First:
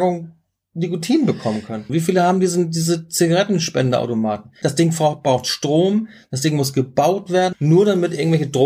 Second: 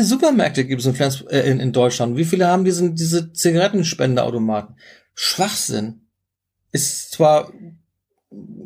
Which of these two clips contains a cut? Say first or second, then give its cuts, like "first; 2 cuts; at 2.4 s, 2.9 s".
first; 3 cuts; at 1.9 s, 4.6 s, 7.5 s